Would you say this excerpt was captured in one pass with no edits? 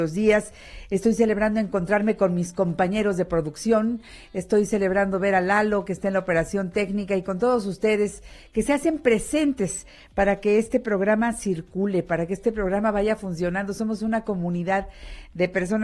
yes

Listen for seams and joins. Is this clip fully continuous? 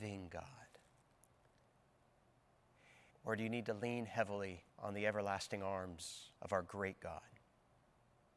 no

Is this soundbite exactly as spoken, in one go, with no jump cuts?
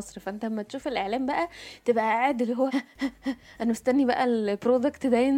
no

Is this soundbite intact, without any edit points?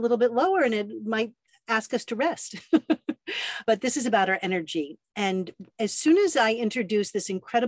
yes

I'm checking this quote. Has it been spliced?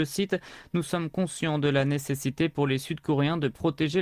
no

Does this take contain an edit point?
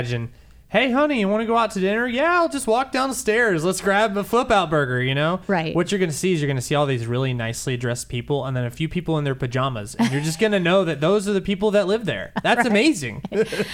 no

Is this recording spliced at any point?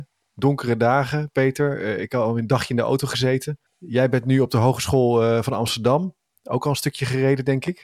yes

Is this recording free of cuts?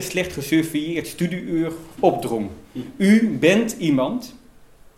yes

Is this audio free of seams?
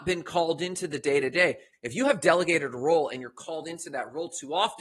no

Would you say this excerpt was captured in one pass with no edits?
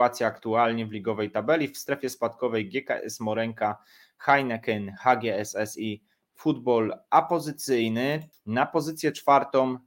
no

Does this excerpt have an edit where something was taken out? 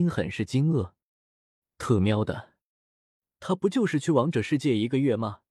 no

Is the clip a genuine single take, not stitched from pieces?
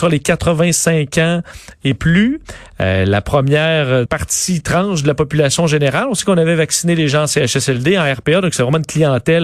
no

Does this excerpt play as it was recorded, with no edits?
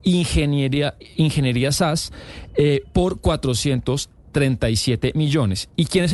yes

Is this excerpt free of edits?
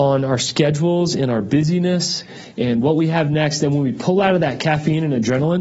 yes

